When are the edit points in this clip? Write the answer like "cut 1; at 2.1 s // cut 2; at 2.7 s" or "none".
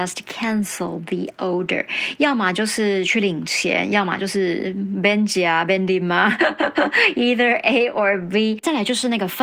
none